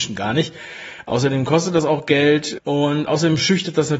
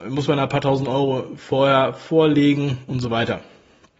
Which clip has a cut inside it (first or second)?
first